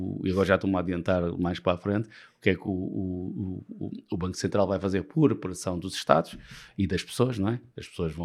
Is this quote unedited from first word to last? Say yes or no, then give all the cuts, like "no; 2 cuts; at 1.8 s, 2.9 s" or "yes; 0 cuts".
yes; 0 cuts